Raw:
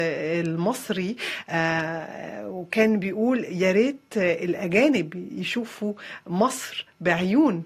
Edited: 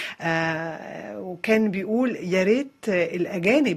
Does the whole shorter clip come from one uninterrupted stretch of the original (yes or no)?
yes